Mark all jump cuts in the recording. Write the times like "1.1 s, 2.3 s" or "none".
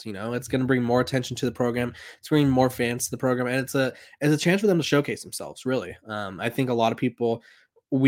none